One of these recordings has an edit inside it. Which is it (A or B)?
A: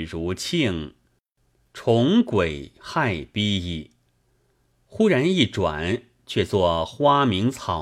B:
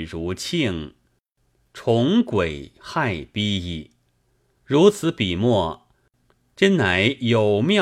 B